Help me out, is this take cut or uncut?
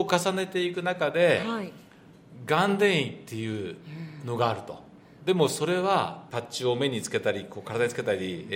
uncut